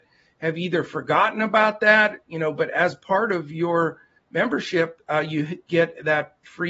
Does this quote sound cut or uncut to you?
uncut